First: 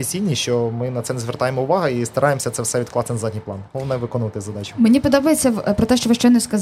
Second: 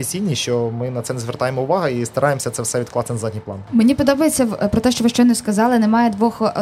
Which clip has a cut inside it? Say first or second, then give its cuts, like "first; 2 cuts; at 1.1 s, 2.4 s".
second; 1 cut; at 3.7 s